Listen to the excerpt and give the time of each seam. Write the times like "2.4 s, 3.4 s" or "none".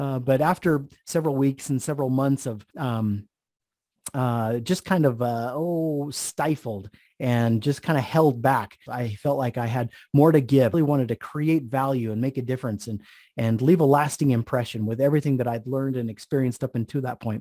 2.7 s, 8.9 s, 10.7 s